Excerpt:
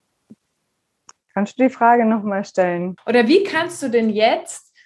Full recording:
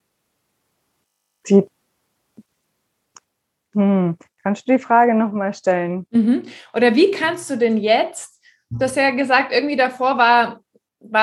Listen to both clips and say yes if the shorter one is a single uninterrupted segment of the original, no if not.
no